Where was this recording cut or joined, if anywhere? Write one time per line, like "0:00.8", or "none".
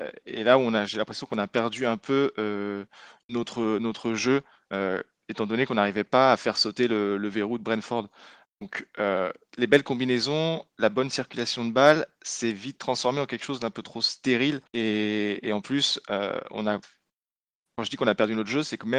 0:14.7